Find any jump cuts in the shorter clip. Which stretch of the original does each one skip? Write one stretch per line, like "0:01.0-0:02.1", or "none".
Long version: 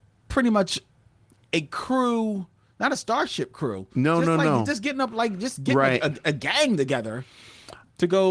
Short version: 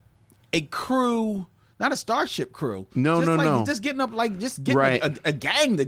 none